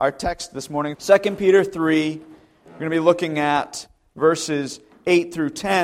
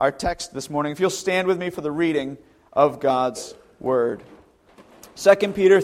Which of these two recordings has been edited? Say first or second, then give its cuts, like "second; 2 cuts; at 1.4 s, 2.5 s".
first; 1 cut; at 0.9 s